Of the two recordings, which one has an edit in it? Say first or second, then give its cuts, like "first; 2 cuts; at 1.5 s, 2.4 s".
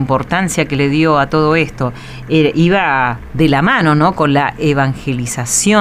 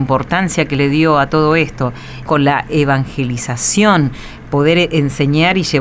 second; 2 cuts; at 2.3 s, 4.5 s